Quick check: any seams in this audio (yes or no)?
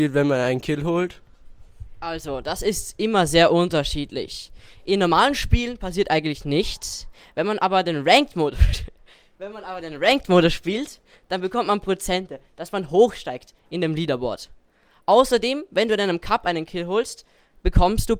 no